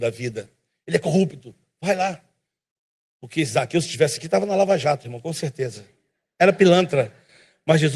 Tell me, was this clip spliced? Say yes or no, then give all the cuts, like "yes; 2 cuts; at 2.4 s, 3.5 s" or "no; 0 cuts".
no; 0 cuts